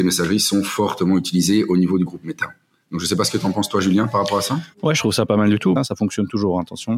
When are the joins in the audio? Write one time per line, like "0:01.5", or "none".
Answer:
0:04.7
0:05.8